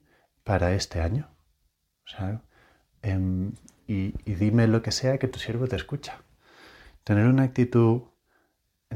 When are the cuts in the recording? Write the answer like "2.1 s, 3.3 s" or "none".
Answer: none